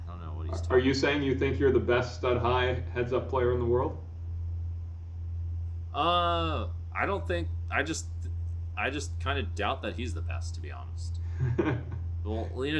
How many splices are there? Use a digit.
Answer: 0